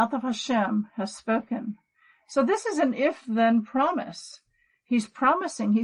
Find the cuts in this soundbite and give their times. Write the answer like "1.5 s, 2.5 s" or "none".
none